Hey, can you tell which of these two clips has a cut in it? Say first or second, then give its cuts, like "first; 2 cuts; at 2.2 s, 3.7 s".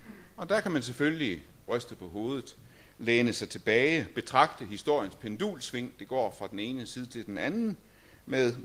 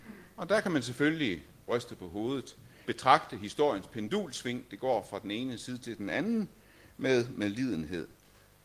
second; 1 cut; at 2.8 s